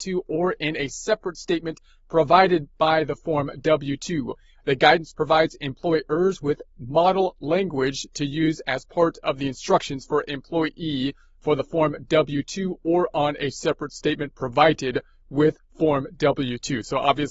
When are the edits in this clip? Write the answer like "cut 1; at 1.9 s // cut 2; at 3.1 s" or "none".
none

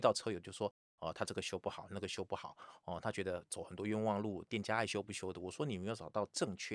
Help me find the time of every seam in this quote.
none

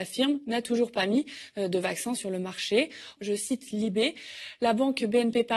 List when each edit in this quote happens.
cut 1; at 3.2 s

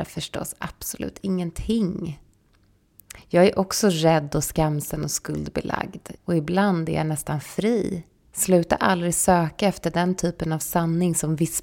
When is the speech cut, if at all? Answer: cut 1; at 6.2 s // cut 2; at 8.2 s

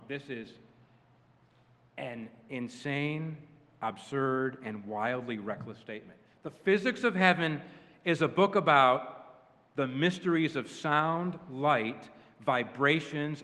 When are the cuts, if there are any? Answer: none

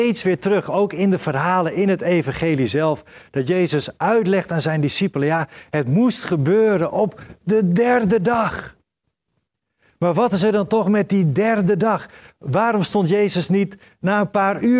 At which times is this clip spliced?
none

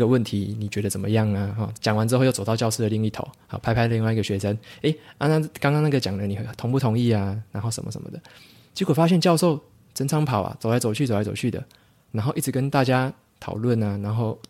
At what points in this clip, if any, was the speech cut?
cut 1; at 1.7 s

